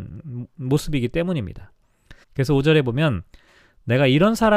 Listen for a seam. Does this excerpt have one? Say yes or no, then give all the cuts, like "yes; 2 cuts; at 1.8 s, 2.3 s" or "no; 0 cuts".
yes; 1 cut; at 2.2 s